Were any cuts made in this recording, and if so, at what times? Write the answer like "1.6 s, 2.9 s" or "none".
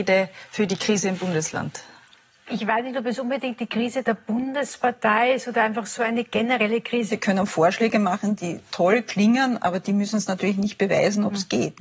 7.1 s